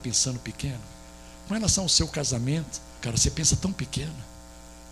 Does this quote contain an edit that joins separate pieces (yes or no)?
yes